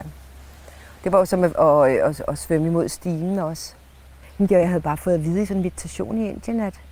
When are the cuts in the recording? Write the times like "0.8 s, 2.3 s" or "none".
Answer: none